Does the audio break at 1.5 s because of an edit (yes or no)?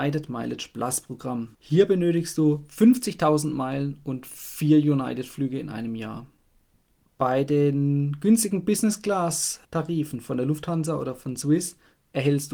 yes